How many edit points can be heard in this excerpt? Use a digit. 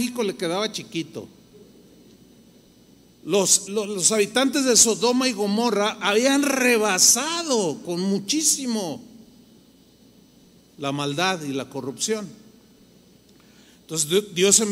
1